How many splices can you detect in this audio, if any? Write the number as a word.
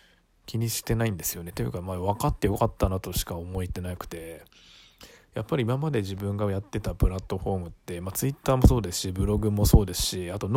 zero